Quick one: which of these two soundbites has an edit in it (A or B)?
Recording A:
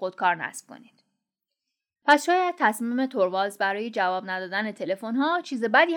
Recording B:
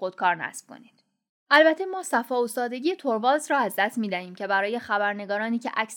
B